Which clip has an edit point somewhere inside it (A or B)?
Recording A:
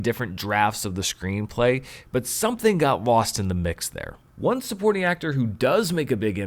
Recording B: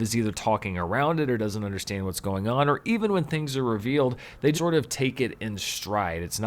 B